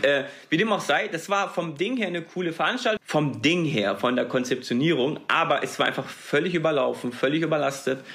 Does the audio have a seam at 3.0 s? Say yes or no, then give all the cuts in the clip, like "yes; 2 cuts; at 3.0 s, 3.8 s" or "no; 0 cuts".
yes; 1 cut; at 3.0 s